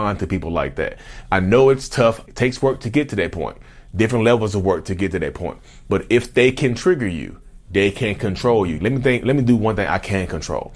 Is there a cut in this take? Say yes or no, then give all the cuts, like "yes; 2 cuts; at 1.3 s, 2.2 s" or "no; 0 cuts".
yes; 2 cuts; at 2.3 s, 8.8 s